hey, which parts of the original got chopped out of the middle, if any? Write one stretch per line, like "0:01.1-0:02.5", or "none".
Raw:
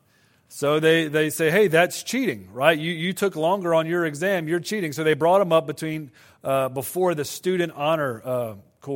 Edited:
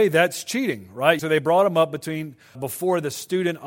0:02.8-0:04.9
0:06.3-0:06.7